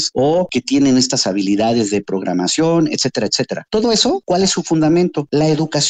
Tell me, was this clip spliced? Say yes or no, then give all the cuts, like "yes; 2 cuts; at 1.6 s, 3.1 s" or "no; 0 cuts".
no; 0 cuts